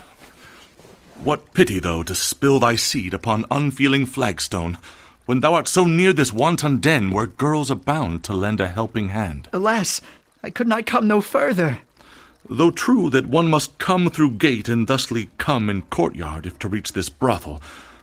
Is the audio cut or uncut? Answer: uncut